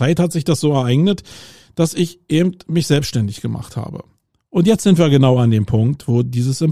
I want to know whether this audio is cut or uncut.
uncut